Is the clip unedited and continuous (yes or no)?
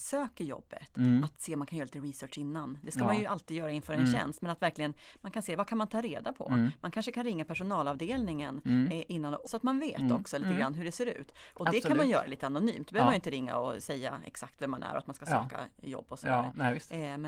no